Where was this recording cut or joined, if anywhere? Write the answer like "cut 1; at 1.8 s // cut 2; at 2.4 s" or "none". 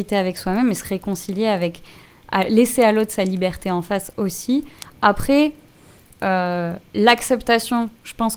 cut 1; at 4.8 s